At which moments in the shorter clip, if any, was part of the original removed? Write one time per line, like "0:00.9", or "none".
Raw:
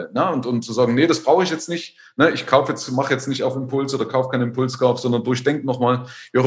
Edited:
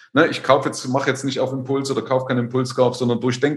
none